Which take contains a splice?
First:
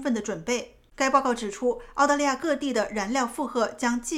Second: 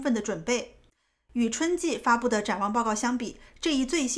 first; 1 cut; at 0.9 s

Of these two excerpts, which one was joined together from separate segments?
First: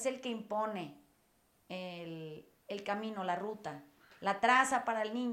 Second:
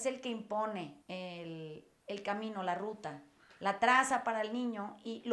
second; 1 cut; at 1.0 s

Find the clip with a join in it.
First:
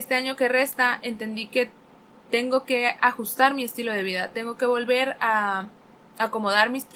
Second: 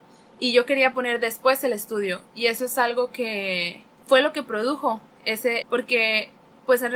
second; 2 cuts; at 3.9 s, 5.6 s

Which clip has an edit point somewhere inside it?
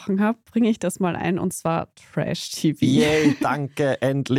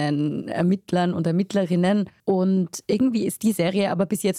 second; 1 cut; at 2.2 s

